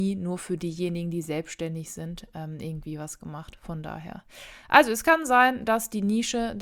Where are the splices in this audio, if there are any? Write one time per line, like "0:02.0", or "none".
none